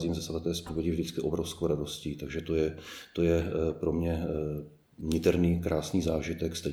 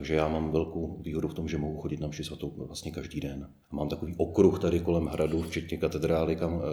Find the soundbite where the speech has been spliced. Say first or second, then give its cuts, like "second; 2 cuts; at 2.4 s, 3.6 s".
second; 1 cut; at 3.6 s